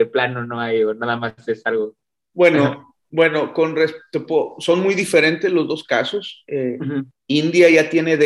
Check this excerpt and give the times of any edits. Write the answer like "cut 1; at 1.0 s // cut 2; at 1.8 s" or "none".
none